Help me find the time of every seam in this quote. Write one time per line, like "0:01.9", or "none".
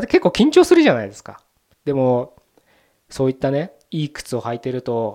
0:01.7